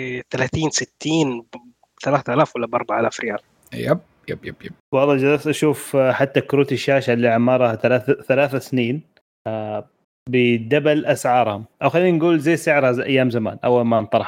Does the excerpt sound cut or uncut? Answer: cut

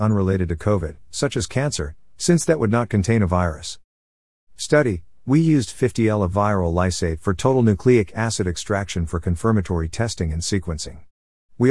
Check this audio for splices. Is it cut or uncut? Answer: uncut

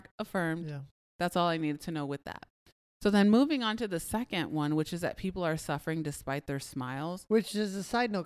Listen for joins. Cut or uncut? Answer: uncut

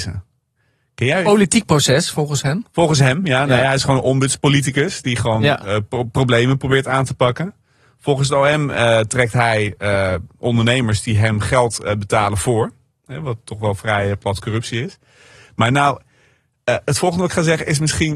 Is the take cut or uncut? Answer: uncut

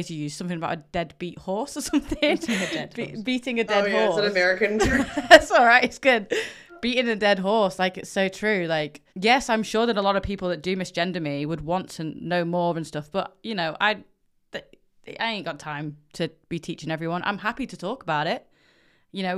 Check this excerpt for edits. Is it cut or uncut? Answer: cut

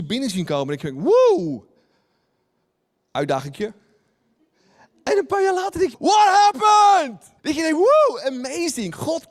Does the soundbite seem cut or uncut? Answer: cut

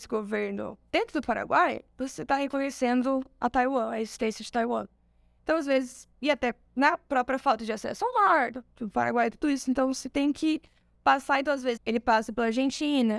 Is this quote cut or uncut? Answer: cut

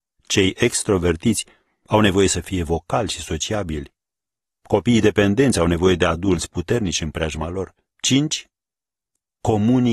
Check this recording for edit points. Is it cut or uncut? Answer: cut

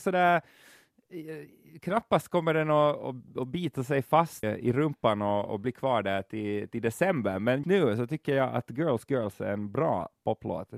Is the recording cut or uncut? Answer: cut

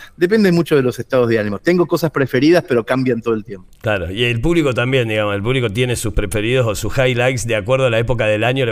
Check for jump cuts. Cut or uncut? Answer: uncut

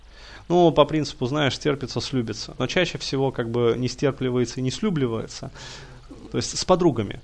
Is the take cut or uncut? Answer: cut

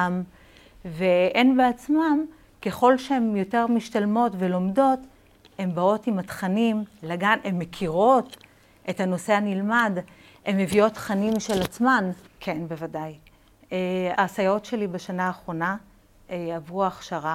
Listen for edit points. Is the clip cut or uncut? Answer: cut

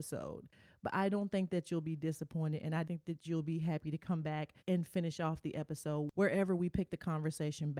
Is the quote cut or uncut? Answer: cut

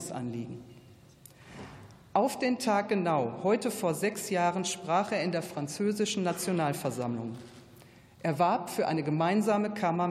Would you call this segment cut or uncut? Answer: uncut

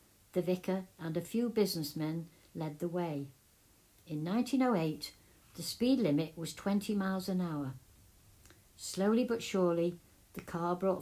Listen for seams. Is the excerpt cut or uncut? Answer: uncut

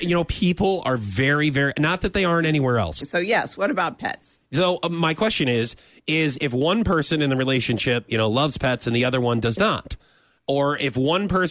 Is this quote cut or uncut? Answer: cut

